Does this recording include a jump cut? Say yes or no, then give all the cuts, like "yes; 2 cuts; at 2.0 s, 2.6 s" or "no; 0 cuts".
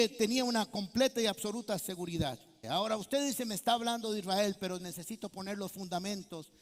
yes; 1 cut; at 2.6 s